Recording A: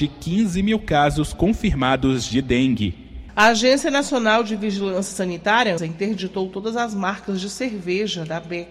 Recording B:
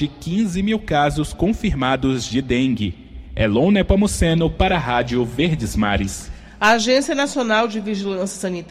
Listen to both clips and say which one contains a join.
A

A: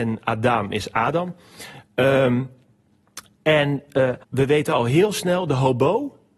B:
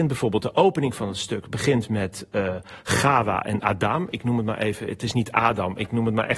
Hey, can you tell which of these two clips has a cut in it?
A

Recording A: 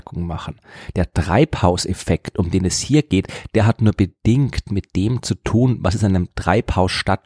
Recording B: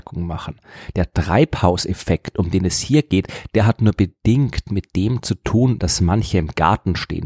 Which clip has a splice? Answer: B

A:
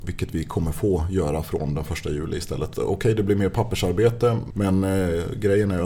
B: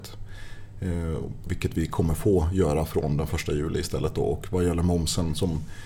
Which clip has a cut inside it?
A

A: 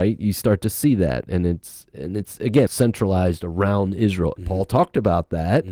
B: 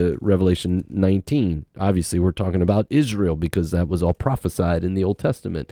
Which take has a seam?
A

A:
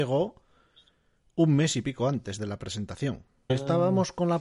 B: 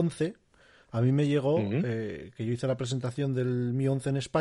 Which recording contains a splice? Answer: A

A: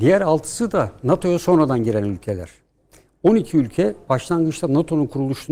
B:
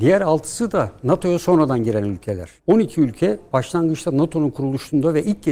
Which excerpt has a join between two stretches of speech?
B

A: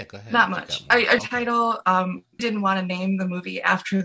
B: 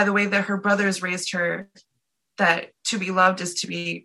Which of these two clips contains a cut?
A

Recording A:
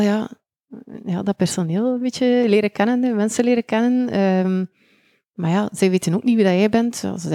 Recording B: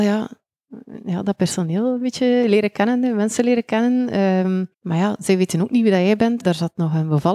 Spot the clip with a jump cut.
B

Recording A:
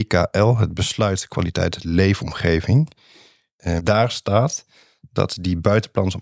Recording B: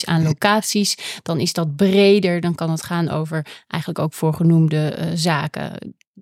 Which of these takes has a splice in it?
A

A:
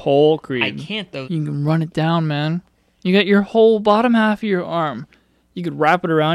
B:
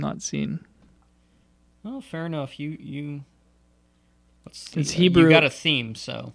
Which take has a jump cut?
A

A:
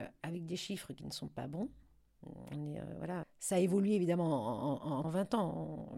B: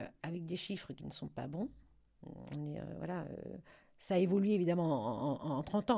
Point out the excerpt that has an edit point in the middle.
A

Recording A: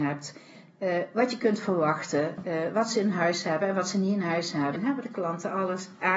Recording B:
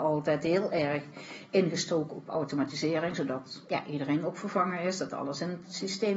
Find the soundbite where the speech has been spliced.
A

